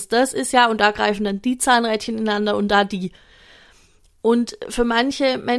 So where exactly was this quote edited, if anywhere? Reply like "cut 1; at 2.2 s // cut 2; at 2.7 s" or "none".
none